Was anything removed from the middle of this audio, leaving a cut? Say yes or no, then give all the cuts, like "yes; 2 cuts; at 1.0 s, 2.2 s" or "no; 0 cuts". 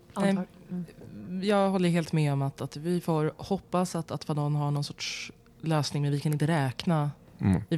no; 0 cuts